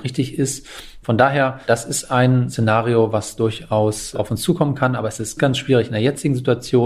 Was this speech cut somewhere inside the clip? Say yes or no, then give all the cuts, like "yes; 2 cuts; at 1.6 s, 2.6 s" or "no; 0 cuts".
yes; 2 cuts; at 1.0 s, 5.4 s